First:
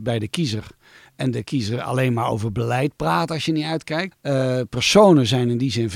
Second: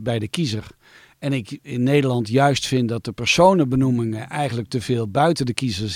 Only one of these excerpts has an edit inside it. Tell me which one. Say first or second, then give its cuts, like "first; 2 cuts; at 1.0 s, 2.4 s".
first; 2 cuts; at 1.1 s, 4.1 s